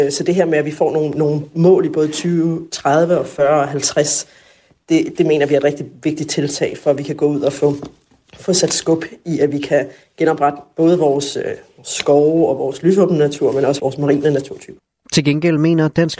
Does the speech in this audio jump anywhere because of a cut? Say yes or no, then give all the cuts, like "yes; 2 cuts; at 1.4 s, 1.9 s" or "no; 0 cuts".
yes; 2 cuts; at 5.1 s, 13.8 s